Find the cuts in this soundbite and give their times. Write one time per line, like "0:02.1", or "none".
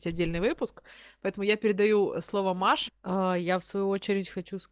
0:02.9